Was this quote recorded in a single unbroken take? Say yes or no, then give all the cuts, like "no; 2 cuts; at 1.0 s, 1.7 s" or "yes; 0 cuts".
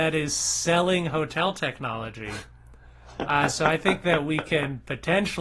yes; 0 cuts